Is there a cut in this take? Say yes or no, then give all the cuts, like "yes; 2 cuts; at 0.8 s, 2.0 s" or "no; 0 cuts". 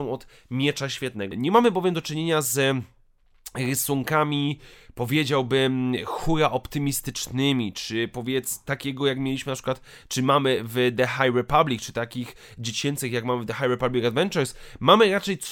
yes; 1 cut; at 1.3 s